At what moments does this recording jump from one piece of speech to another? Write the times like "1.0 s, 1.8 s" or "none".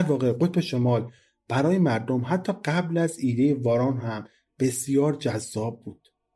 none

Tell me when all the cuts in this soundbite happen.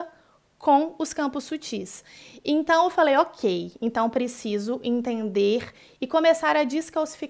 none

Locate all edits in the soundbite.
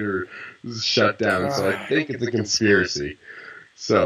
none

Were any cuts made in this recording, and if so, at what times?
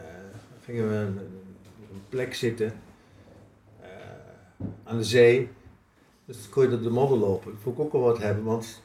6.1 s

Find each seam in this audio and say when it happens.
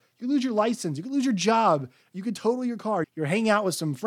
3.0 s

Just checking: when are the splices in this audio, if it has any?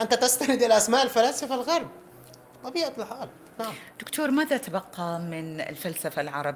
none

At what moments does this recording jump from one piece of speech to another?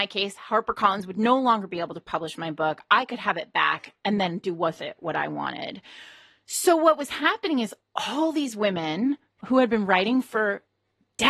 none

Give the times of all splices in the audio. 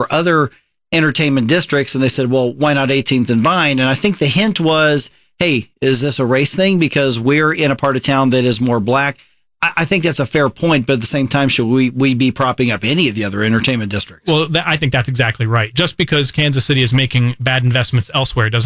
none

